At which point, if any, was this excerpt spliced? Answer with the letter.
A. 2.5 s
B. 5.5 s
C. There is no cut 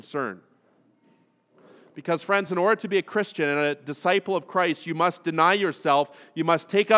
C